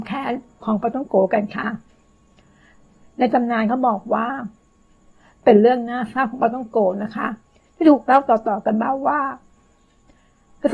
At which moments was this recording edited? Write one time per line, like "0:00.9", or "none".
none